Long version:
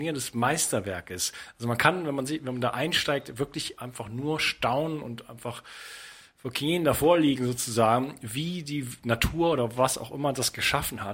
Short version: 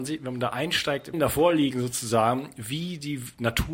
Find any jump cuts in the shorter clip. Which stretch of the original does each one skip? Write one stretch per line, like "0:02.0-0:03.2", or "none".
0:03.3-0:06.8